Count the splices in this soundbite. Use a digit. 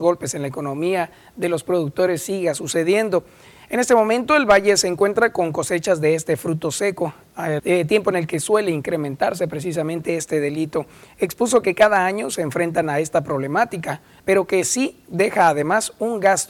2